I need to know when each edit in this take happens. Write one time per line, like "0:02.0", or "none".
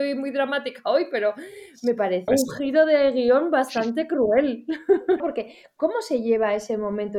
0:02.3
0:05.2